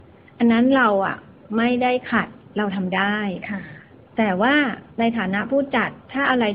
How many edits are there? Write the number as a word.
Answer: one